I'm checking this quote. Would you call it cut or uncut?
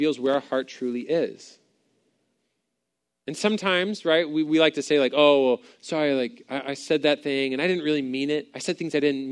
uncut